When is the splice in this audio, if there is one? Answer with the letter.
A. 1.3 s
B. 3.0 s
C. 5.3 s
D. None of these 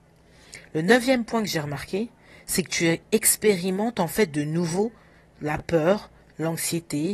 B